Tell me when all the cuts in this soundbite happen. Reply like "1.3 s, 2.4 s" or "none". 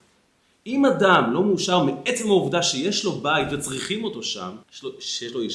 4.6 s